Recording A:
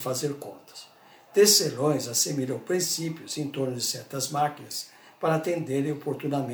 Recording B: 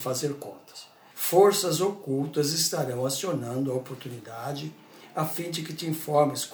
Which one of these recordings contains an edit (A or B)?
B